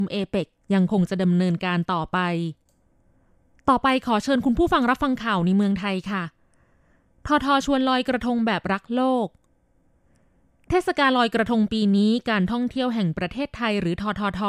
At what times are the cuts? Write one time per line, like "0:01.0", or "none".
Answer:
0:07.4